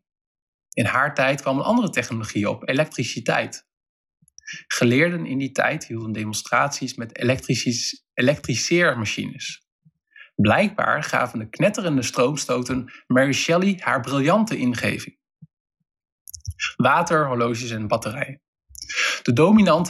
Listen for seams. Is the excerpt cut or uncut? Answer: uncut